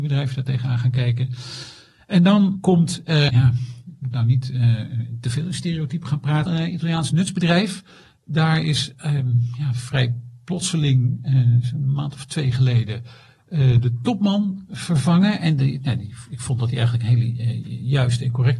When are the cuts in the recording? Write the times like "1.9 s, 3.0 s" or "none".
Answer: 3.3 s, 6.5 s